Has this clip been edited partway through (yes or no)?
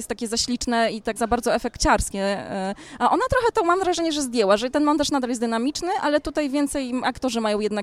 yes